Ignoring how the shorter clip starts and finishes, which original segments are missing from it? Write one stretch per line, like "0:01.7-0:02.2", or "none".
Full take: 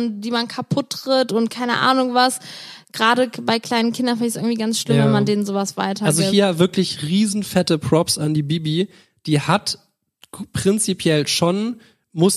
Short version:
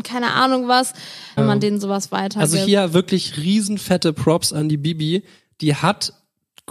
0:02.8-0:05.0